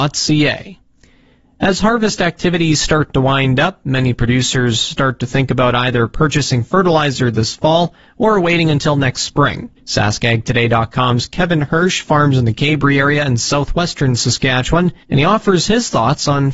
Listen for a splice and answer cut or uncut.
cut